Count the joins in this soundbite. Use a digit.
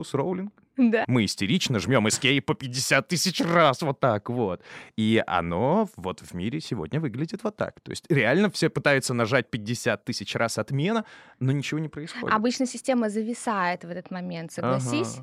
1